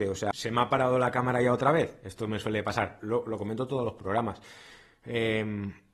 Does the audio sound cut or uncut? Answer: cut